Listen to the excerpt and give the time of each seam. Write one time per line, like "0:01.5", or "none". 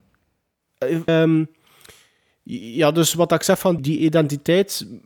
0:01.1
0:03.8

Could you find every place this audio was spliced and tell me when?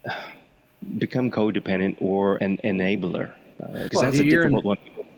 0:02.4
0:03.9

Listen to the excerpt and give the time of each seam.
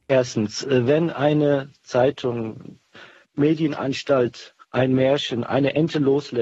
0:03.2
0:04.6

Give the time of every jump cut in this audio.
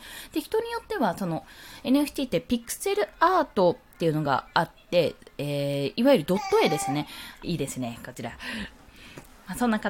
0:07.4

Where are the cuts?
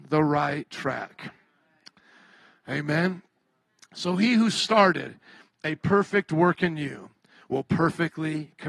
none

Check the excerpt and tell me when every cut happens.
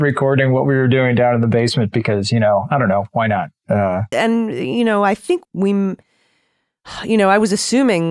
0:04.1
0:05.4

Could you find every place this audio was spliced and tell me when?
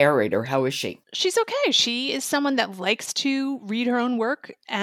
0:01.0

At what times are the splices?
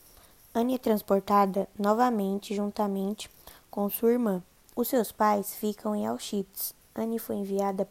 0:04.7
0:06.8

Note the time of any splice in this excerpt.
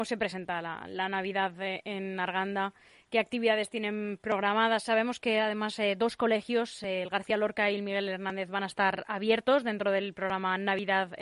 none

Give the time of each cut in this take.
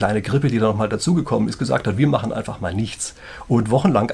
none

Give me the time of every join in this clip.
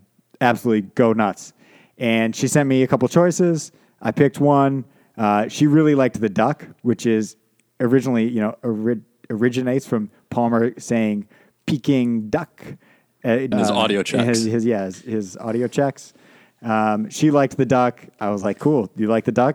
0:13.5

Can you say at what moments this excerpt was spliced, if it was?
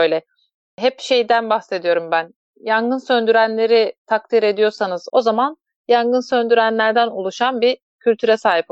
0:05.1

